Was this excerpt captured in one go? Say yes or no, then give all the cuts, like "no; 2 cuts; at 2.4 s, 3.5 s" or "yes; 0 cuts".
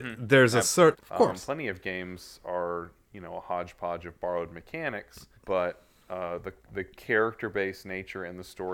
no; 2 cuts; at 0.9 s, 5.4 s